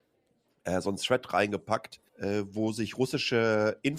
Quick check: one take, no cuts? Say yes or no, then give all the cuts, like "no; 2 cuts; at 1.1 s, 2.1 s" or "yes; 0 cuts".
no; 1 cut; at 2.1 s